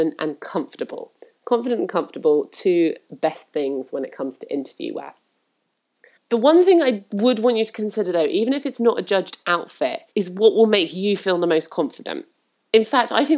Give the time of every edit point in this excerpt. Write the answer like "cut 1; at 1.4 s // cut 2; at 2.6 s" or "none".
cut 1; at 6.2 s // cut 2; at 10.1 s